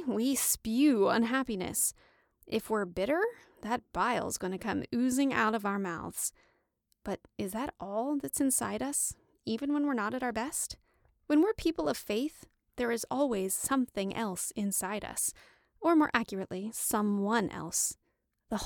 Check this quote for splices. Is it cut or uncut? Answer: uncut